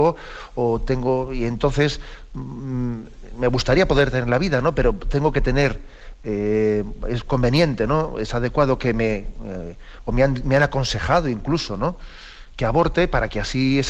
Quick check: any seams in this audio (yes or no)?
no